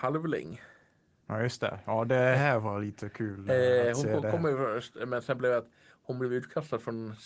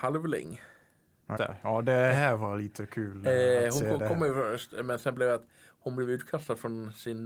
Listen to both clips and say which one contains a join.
second; 1 cut; at 1.4 s

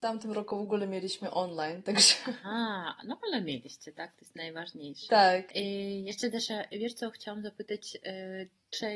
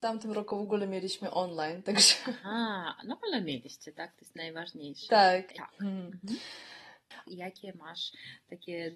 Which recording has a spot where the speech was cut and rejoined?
second; 2 cuts; at 5.5 s, 7.2 s

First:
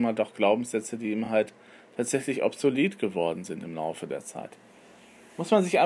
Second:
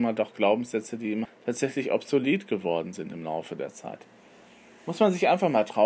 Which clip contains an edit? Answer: second; 1 cut; at 1.3 s

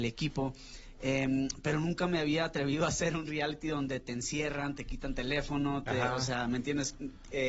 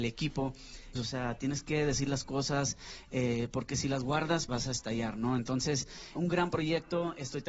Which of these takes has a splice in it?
second; 3 cuts; at 1.0 s, 4.5 s, 6.2 s

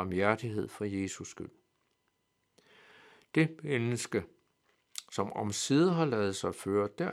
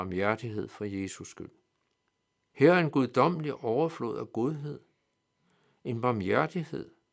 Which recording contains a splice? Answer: second; 1 cut; at 2.5 s

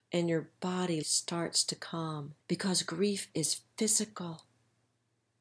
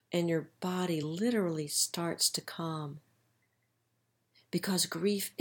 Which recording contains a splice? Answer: first; 2 cuts; at 1.0 s, 2.4 s

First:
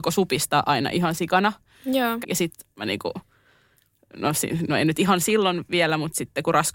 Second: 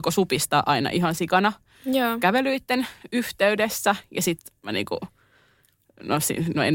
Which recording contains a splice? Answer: first; 1 cut; at 2.2 s

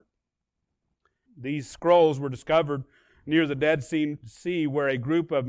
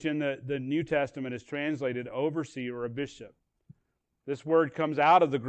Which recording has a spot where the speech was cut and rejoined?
first; 1 cut; at 1.3 s

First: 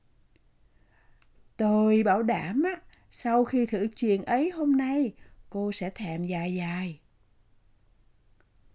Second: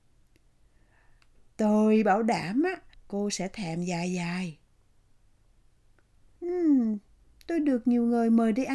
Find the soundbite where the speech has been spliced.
second; 2 cuts; at 2.9 s, 6.4 s

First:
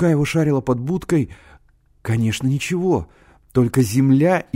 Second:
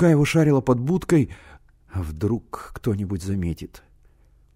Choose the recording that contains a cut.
second; 1 cut; at 1.8 s

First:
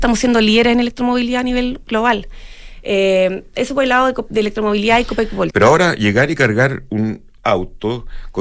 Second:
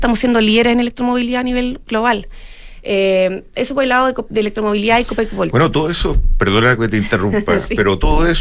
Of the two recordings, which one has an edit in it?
first; 1 cut; at 5.5 s

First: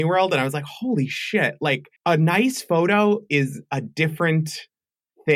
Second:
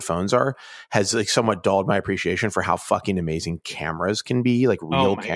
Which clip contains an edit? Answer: first; 1 cut; at 2.0 s

